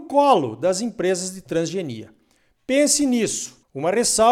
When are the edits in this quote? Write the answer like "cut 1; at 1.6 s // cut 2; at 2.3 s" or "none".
none